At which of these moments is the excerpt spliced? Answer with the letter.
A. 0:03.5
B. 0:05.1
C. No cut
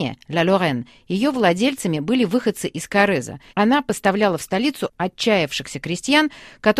A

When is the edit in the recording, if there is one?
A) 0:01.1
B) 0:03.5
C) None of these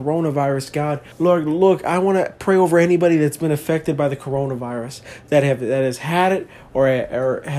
A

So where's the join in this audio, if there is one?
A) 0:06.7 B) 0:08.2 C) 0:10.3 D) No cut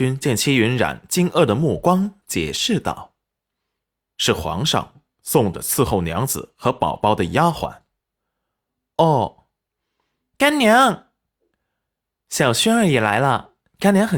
D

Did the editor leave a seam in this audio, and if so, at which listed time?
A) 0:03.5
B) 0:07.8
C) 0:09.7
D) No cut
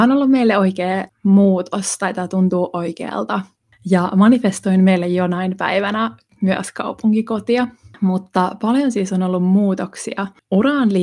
D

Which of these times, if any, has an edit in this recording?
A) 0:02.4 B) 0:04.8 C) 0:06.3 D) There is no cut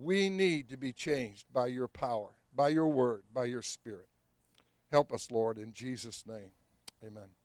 D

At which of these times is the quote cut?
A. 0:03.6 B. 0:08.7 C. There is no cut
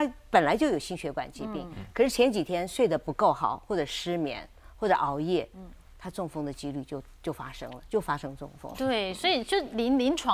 B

